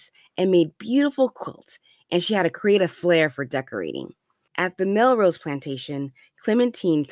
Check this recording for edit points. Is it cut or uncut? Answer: cut